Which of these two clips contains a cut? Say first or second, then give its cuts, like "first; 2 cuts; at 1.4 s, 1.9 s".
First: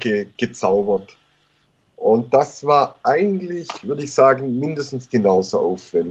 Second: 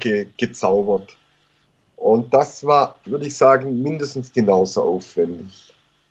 second; 1 cut; at 3.0 s